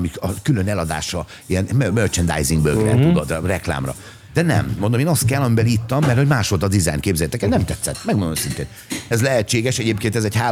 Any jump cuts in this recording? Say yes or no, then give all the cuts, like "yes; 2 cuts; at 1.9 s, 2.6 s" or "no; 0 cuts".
yes; 2 cuts; at 4.3 s, 9.1 s